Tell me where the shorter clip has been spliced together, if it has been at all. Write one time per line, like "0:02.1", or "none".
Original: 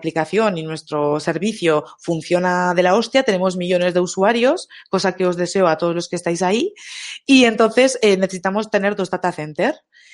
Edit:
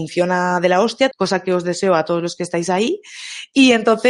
0:01.1

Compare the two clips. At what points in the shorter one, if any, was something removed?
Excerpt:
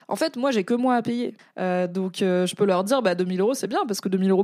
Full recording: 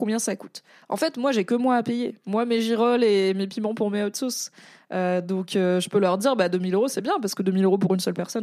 0:01.4

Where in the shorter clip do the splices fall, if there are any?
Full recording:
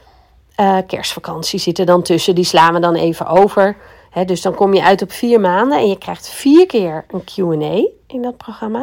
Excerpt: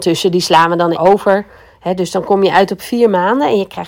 0:00.9

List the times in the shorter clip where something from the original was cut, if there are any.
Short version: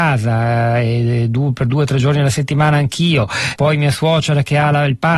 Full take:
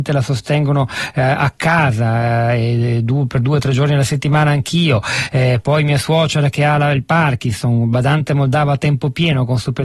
0:03.6

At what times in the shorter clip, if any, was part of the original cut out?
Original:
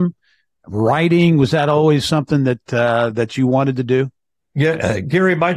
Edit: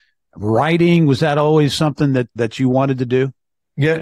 0:02.4

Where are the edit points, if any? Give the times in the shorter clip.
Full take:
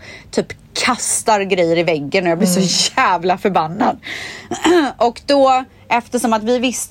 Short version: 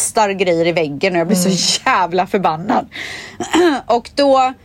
none

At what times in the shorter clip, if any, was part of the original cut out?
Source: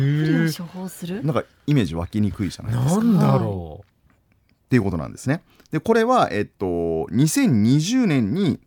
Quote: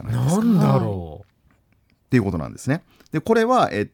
none

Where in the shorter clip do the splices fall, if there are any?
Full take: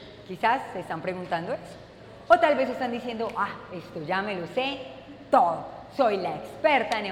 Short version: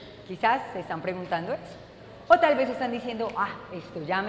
none

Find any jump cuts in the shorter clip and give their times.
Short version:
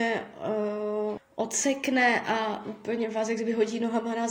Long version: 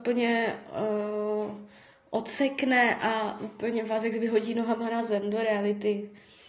0:01.2

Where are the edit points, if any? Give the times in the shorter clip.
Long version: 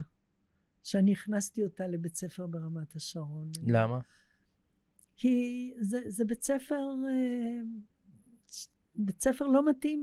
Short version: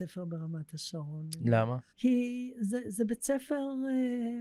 0:01.9

